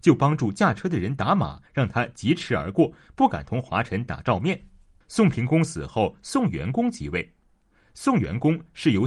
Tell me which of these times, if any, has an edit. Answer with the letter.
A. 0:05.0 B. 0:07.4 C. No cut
A